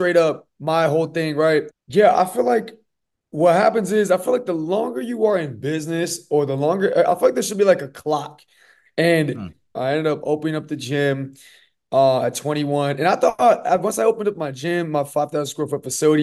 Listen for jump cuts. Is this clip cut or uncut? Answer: cut